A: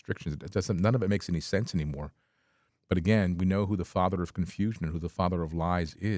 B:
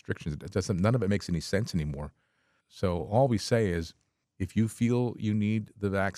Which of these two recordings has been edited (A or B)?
B